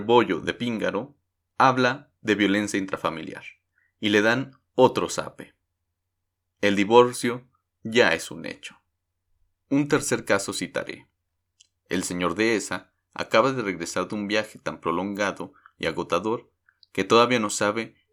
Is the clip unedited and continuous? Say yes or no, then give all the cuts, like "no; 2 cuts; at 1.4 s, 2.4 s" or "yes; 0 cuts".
no; 1 cut; at 1.4 s